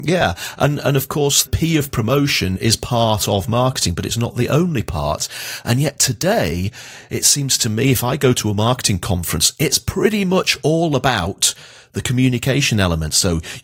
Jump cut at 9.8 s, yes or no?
no